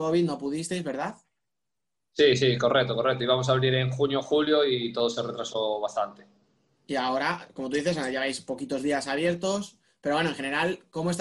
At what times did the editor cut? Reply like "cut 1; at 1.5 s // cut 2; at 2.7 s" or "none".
none